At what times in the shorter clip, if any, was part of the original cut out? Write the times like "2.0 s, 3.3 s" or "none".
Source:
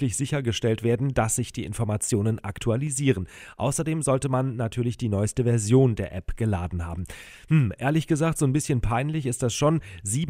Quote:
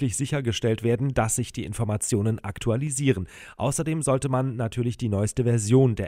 none